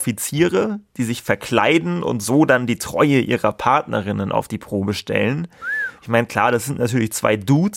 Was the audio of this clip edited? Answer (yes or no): no